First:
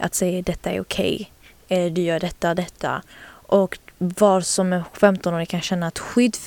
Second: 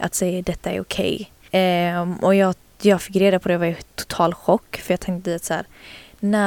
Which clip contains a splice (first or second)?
second